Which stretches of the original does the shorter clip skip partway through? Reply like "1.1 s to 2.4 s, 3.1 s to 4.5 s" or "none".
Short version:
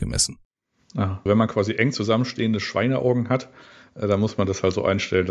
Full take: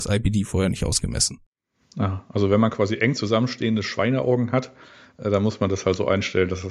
2.3 s to 2.5 s